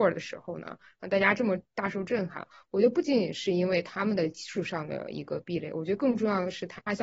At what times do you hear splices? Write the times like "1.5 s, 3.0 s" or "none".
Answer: none